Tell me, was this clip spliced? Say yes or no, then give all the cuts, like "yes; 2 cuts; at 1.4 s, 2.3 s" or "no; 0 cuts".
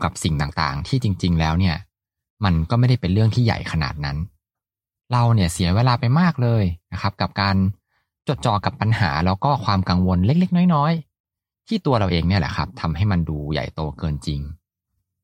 no; 0 cuts